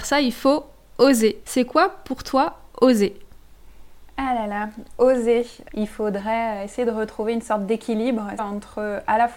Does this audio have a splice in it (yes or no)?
yes